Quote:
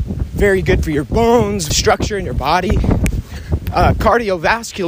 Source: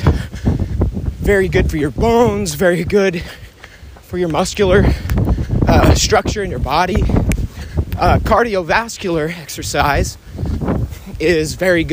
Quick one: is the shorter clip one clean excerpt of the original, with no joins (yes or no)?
no